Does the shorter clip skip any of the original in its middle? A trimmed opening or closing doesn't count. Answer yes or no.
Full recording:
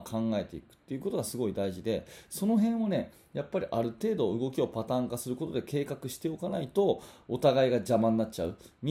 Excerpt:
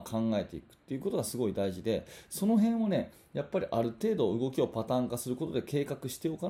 no